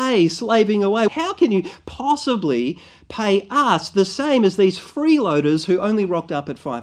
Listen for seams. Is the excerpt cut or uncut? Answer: cut